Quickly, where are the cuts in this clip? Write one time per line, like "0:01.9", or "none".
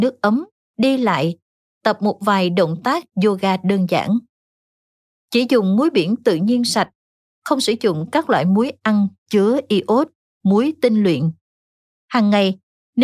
none